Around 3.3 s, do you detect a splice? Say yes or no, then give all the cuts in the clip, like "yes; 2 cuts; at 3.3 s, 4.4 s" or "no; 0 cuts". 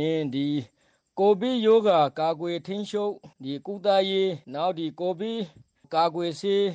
yes; 2 cuts; at 3.3 s, 4.4 s